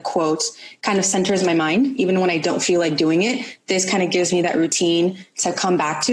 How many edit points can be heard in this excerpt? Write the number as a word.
zero